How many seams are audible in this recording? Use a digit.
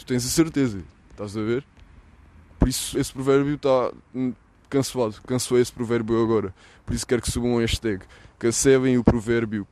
1